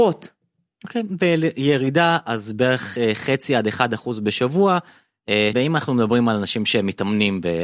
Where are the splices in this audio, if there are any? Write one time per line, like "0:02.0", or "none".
0:05.5